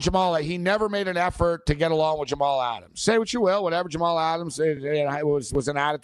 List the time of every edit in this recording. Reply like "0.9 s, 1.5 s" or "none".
none